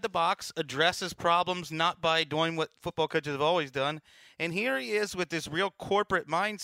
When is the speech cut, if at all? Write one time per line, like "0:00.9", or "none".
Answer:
none